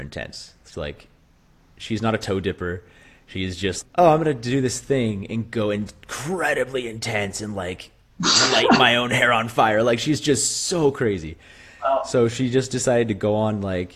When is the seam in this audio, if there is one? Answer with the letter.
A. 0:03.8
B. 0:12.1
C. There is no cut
A